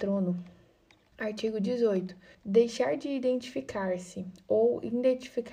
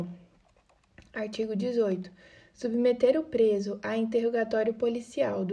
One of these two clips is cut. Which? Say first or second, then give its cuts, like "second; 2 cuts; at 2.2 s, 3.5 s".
first; 2 cuts; at 1.1 s, 2.3 s